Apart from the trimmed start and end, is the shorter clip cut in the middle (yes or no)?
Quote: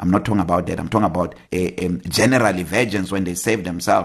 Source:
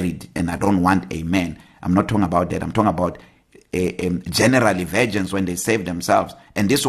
yes